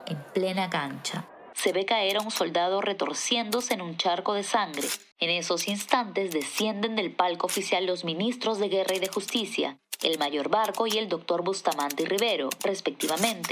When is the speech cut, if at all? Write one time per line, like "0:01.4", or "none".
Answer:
0:01.5
0:05.1